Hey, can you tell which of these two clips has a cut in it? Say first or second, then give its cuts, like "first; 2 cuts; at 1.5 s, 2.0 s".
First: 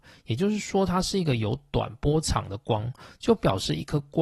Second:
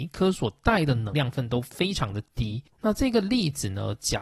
second; 2 cuts; at 1.1 s, 2.8 s